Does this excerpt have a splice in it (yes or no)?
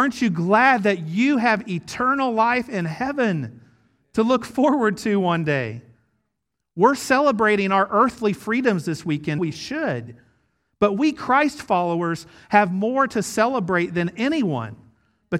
yes